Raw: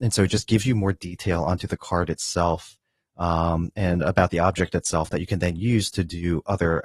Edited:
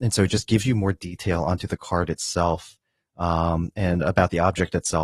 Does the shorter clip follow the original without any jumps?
yes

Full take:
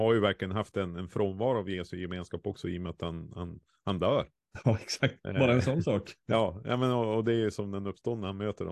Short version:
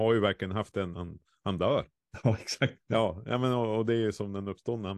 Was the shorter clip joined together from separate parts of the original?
yes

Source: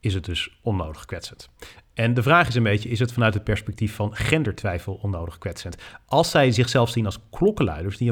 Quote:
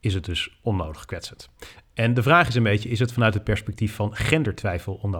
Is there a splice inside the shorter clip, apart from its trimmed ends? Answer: no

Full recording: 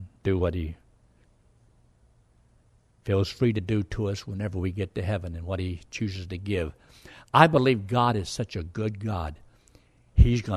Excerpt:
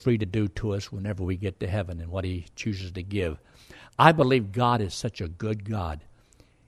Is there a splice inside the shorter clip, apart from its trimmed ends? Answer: no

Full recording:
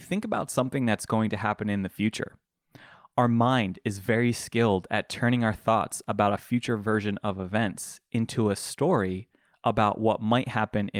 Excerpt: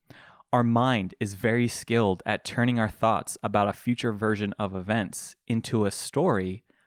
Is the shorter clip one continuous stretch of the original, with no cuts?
yes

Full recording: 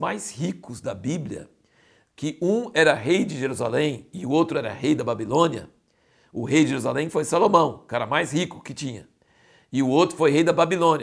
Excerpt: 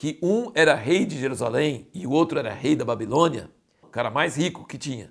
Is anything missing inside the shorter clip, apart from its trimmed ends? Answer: yes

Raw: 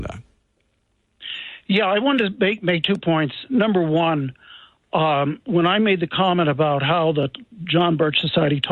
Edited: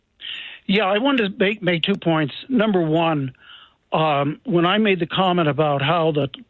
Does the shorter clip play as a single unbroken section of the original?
yes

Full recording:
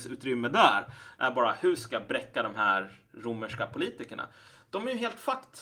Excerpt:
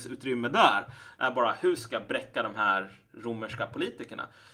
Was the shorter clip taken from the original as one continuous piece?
yes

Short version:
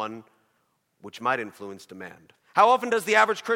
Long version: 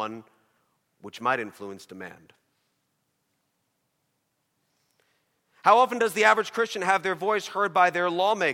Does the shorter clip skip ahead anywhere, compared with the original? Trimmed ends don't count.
yes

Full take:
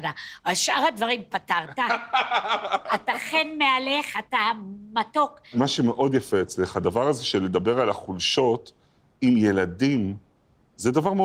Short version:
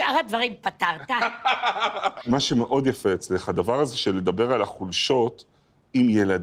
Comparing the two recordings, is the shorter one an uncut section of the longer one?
no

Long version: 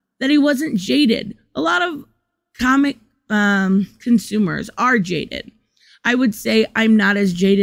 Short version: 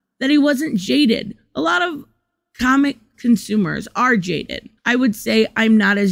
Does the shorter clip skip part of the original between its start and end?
yes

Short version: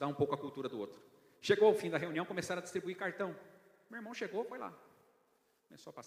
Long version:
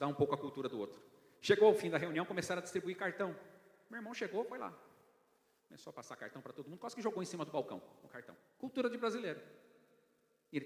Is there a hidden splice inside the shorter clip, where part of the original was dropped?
no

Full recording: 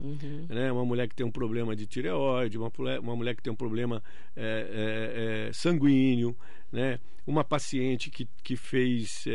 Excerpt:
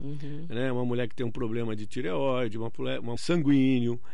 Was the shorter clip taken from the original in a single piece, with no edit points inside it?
no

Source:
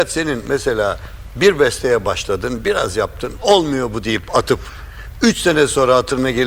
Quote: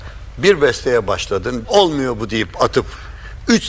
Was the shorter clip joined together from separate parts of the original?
yes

